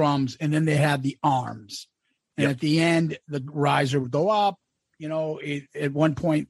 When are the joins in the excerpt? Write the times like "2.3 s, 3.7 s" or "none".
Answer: none